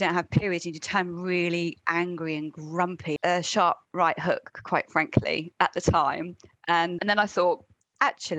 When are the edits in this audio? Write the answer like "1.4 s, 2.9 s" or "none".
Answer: 3.2 s, 7.0 s